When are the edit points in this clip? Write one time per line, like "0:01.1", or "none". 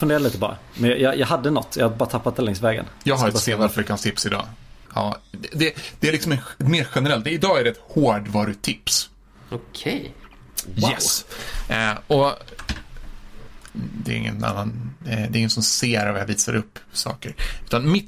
0:04.9
0:13.7

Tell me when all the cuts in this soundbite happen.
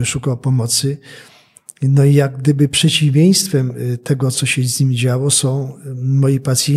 none

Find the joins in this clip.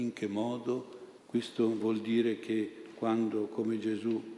0:01.2

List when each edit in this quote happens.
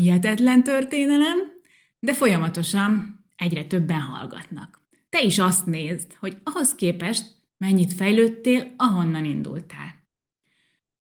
none

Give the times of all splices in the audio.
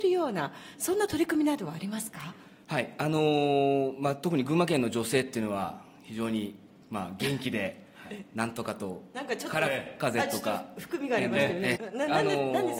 0:11.7

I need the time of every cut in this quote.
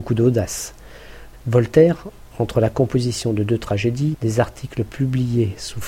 0:01.3
0:04.1

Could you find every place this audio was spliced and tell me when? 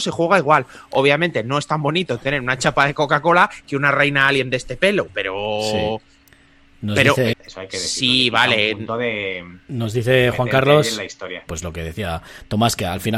0:07.3
0:11.5

